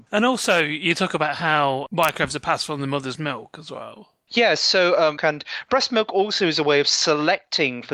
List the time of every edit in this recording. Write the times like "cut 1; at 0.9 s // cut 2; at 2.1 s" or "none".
cut 1; at 5.2 s